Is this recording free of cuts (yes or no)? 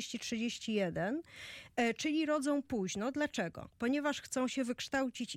yes